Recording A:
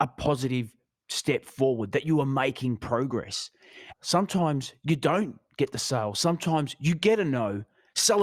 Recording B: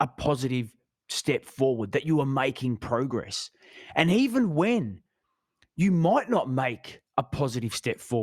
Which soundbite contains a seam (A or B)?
A